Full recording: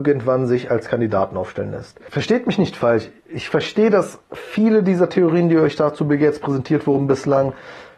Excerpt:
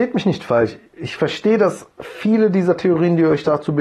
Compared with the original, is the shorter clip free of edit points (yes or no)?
yes